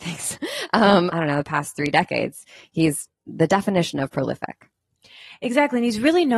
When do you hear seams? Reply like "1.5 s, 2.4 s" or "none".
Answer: 1.1 s